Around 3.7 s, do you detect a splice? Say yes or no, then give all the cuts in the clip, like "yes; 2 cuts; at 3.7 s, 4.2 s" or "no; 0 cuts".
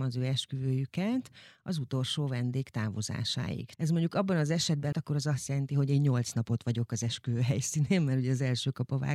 yes; 2 cuts; at 3.7 s, 4.9 s